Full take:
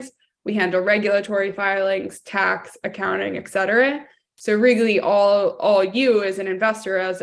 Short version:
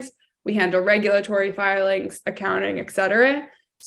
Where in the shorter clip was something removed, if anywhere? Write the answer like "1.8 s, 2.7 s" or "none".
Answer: 2.2 s